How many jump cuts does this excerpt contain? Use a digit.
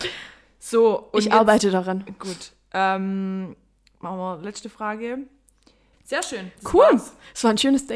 1